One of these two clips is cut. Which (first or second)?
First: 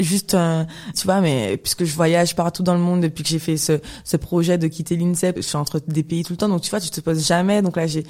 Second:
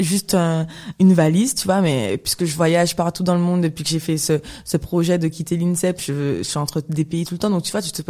first